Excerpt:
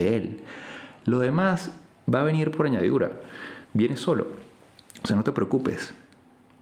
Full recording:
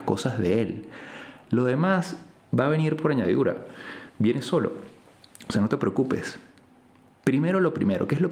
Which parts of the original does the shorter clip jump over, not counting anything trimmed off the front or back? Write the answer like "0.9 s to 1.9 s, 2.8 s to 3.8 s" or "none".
none